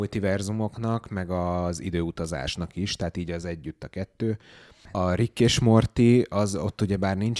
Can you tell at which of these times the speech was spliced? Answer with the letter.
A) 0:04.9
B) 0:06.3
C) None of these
C